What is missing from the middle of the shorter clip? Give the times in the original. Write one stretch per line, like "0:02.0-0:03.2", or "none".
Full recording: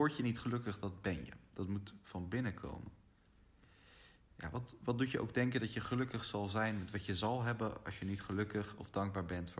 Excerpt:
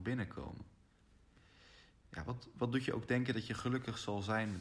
none